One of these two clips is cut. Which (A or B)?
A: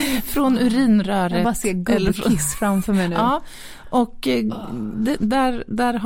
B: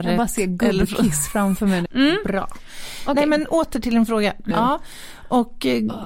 B